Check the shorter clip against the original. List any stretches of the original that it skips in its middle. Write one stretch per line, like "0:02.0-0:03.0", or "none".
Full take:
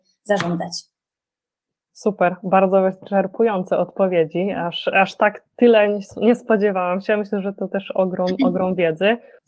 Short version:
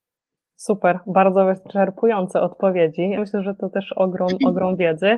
0:04.5-0:07.2